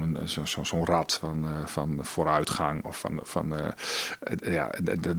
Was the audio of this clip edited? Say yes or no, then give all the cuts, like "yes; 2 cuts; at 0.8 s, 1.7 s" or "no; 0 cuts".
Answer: no; 0 cuts